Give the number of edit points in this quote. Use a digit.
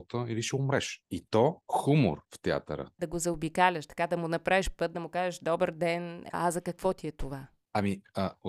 3